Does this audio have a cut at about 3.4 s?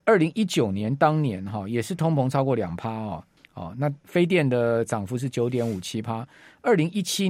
yes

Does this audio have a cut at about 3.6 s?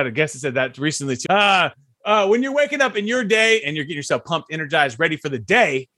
yes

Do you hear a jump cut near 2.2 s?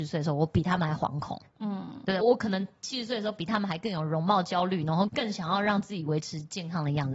yes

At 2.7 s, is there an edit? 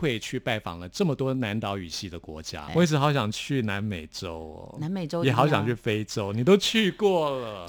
yes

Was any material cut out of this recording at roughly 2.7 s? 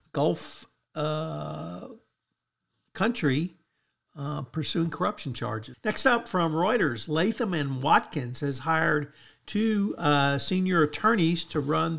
no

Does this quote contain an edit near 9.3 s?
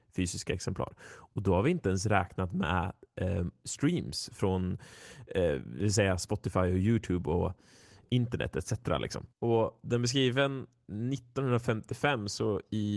yes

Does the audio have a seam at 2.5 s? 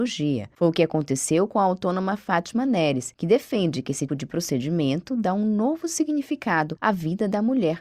no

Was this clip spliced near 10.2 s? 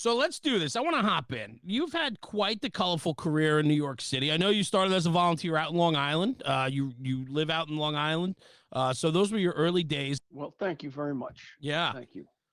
yes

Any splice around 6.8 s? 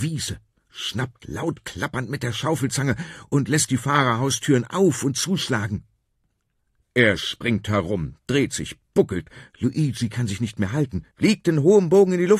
yes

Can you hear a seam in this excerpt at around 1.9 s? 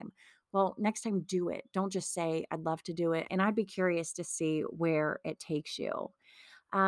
no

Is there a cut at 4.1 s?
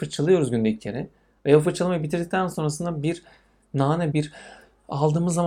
yes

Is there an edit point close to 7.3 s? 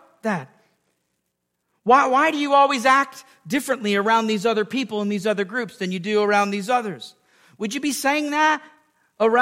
no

